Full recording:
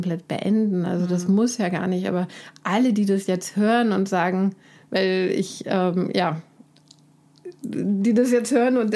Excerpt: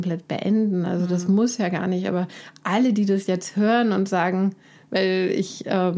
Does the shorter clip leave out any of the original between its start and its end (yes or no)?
no